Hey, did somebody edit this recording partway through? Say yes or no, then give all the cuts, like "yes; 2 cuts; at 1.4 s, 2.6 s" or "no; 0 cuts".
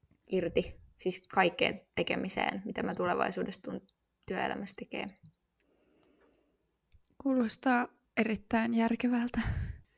no; 0 cuts